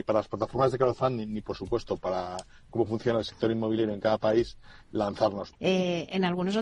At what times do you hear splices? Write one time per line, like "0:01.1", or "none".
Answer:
0:05.5